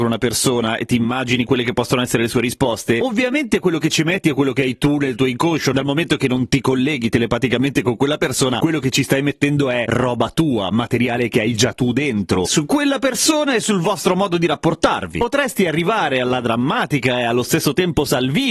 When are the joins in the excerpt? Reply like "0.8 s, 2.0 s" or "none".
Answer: 12.4 s